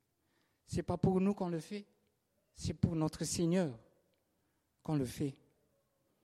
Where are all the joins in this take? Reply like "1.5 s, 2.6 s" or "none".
none